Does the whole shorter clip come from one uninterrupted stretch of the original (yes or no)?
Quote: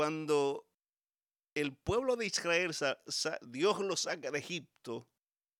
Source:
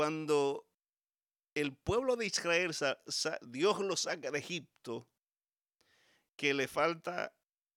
yes